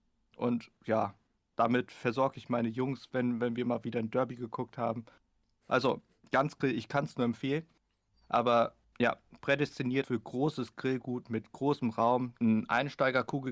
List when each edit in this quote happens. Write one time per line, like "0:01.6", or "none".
0:08.1
0:10.0
0:12.4